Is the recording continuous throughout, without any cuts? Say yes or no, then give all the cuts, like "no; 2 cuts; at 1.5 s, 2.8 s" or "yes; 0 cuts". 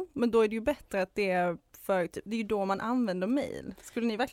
no; 1 cut; at 2.3 s